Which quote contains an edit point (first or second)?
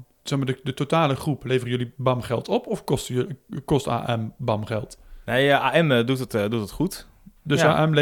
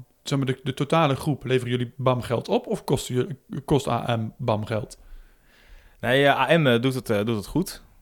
first